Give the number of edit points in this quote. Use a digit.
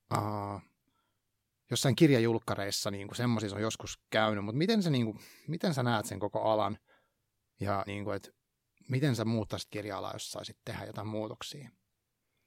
1